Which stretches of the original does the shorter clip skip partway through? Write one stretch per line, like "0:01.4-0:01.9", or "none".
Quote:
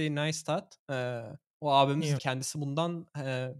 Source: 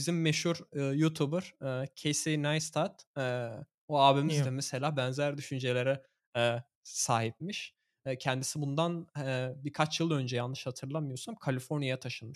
0:04.4-0:08.2